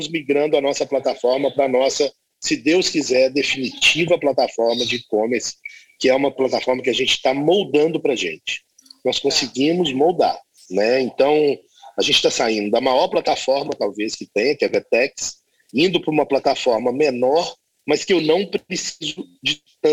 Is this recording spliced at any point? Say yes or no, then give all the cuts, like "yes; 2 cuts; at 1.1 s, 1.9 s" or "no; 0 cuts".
no; 0 cuts